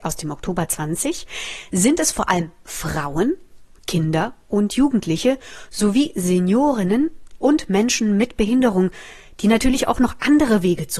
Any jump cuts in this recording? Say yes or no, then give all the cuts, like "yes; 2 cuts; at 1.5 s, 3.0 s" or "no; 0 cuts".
no; 0 cuts